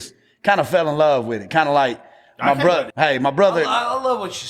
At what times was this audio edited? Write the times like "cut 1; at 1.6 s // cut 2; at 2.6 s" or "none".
cut 1; at 2.9 s